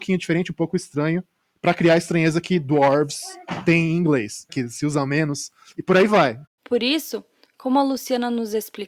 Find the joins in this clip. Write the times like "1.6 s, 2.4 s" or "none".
4.5 s, 6.5 s

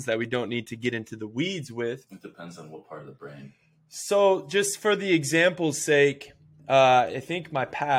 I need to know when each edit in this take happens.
2.1 s

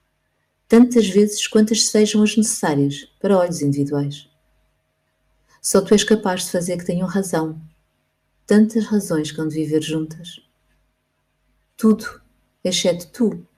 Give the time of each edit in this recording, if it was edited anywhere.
none

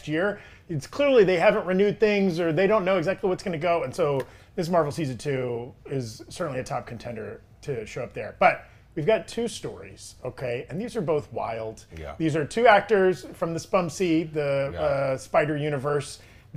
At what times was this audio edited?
none

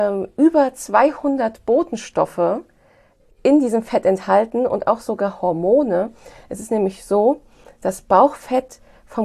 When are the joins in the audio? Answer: none

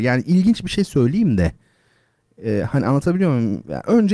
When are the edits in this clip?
none

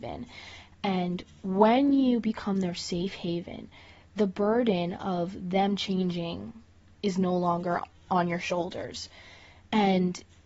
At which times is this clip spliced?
none

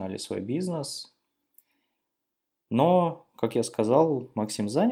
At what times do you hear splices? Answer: none

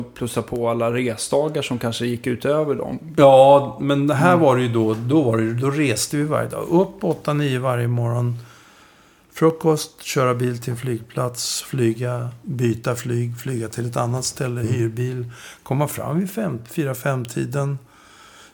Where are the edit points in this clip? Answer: none

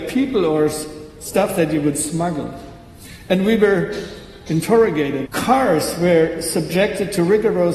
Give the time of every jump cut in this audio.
5.3 s

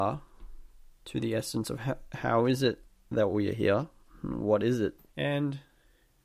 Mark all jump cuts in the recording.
5.0 s

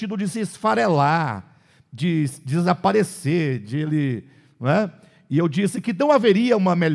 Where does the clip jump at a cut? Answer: none

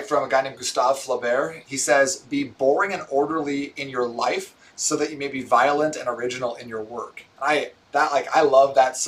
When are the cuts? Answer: none

